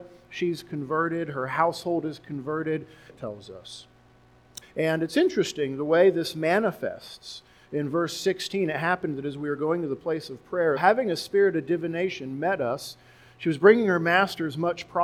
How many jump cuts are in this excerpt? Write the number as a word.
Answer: three